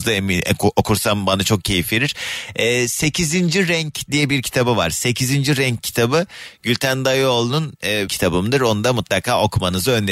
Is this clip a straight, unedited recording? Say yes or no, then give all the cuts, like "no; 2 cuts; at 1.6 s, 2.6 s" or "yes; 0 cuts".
no; 1 cut; at 8.1 s